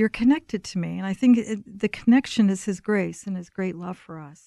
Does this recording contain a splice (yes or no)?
yes